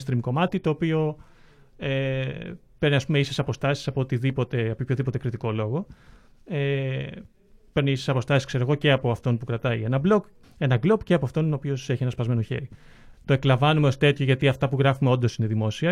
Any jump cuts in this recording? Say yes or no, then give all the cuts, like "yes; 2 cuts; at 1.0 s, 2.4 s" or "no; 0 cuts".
yes; 2 cuts; at 10.4 s, 13.1 s